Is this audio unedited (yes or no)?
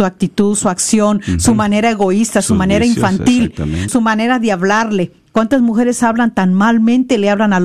no